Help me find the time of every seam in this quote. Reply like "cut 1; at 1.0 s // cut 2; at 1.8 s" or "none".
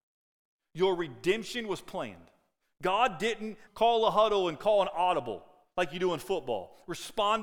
cut 1; at 3.7 s